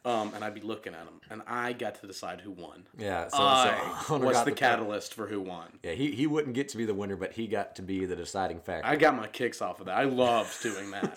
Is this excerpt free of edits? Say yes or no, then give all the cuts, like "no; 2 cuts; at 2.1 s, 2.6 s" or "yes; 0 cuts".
yes; 0 cuts